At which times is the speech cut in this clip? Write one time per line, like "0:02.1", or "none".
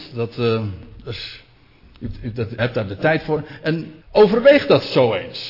0:02.6
0:04.0